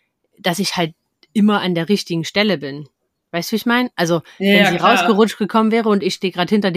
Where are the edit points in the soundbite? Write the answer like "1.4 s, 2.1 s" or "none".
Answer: none

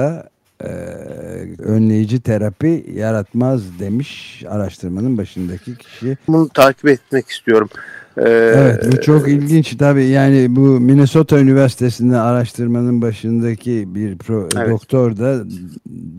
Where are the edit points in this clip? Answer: 1.6 s, 6.3 s

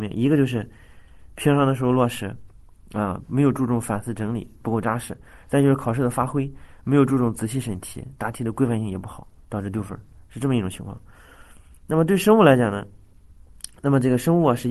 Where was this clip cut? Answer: none

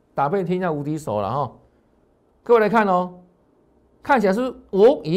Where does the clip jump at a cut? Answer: none

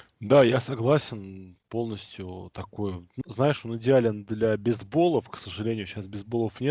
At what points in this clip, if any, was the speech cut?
3.2 s

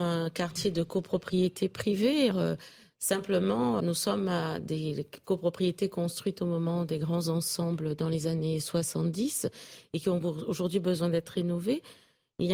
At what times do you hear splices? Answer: 2.3 s, 3.8 s

